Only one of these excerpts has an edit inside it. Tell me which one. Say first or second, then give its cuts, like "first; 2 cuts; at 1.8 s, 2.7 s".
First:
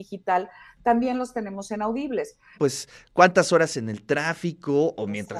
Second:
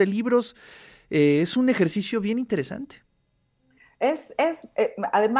first; 1 cut; at 2.5 s